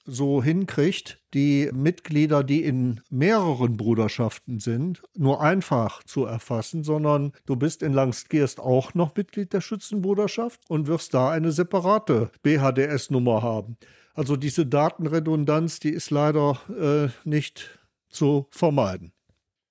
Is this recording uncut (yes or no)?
yes